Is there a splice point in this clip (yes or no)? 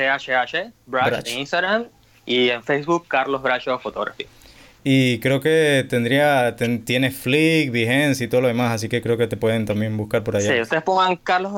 no